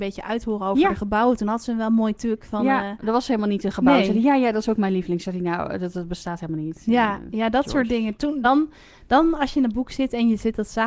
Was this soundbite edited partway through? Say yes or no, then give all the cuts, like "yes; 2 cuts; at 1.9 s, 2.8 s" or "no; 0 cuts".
no; 0 cuts